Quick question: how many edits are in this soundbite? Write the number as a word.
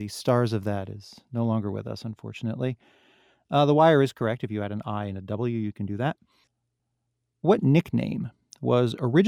zero